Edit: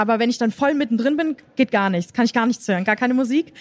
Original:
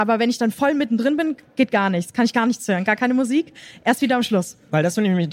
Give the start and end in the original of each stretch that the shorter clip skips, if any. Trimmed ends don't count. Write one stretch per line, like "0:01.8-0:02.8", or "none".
none